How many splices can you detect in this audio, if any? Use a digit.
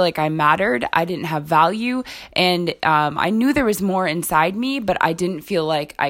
0